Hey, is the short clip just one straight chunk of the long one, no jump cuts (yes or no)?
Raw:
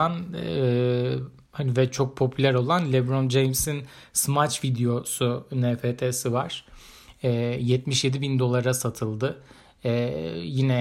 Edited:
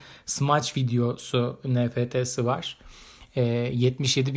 yes